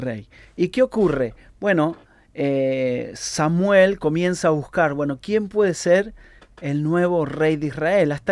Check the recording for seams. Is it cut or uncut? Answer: uncut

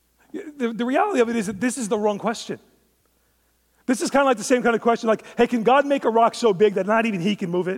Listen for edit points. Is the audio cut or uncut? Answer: uncut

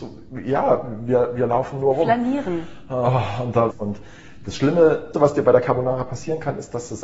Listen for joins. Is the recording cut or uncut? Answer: cut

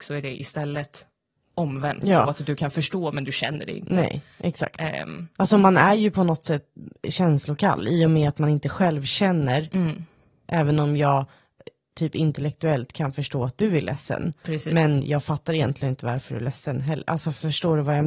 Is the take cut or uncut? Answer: uncut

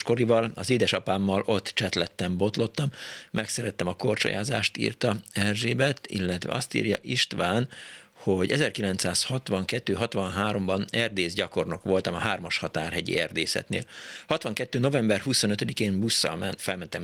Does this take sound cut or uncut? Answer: uncut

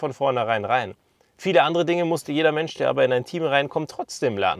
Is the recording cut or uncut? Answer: uncut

